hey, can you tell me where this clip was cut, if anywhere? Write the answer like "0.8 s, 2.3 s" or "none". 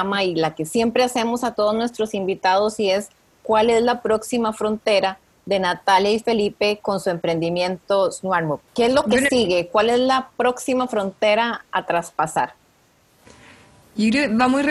8.7 s

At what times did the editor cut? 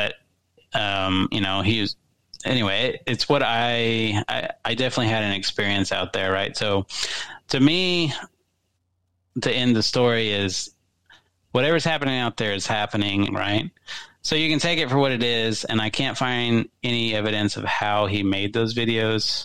13.3 s

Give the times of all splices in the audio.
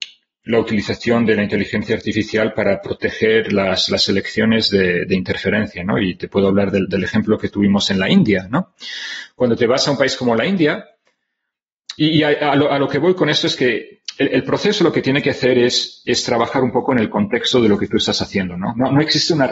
none

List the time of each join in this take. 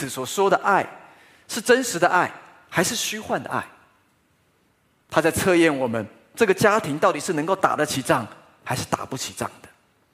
none

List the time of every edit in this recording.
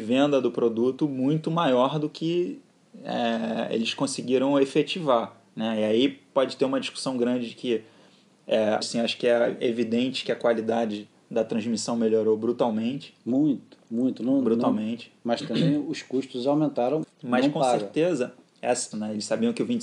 8.8 s, 17.0 s, 18.9 s

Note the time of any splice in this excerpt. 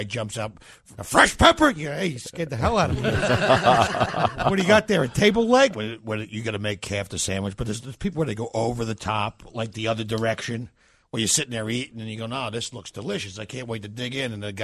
0.9 s, 5.7 s

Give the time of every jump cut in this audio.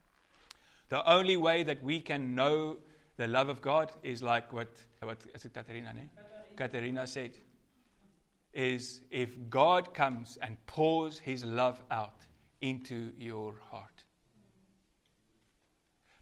5.0 s

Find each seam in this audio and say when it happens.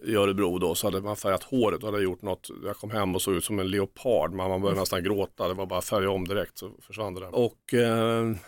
7.3 s

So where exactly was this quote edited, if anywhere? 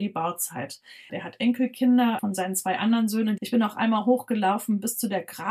1.1 s, 2.2 s, 3.4 s

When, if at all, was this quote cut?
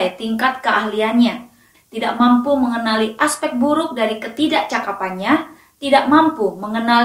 1.7 s

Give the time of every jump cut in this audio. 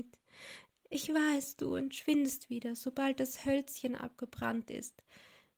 none

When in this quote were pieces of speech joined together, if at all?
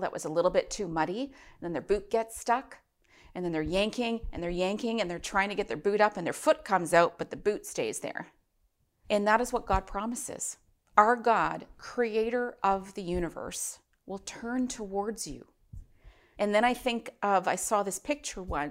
9.0 s, 16.3 s

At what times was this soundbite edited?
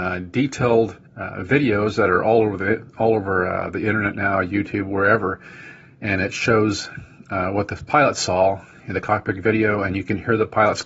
1.1 s

